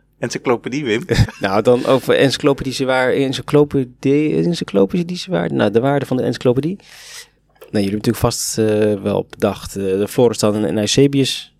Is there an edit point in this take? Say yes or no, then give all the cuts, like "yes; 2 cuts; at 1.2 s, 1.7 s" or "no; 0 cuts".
yes; 1 cut; at 1.2 s